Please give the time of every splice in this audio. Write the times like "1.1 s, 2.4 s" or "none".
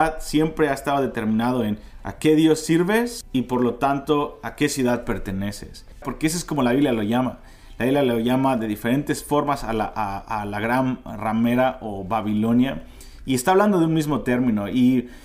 6.0 s